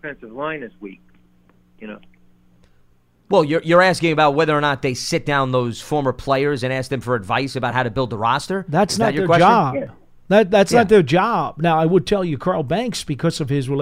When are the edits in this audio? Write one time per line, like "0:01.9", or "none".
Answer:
none